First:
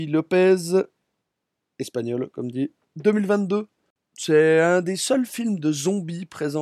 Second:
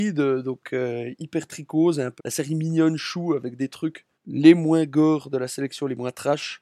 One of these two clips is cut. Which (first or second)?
second